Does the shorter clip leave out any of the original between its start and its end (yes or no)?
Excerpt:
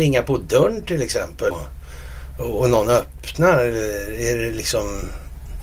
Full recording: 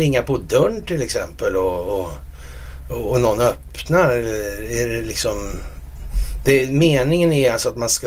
yes